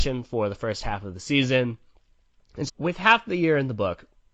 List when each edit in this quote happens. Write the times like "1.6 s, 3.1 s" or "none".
2.7 s